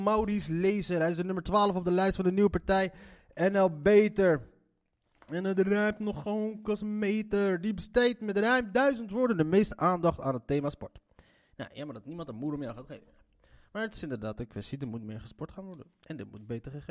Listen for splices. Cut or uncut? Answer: uncut